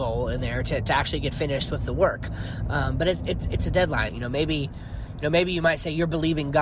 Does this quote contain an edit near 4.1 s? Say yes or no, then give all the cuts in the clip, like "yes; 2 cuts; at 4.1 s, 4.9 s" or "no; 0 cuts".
yes; 1 cut; at 4.1 s